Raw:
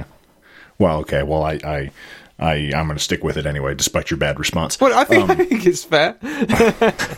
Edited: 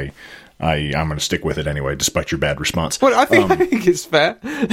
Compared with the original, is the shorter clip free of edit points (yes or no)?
yes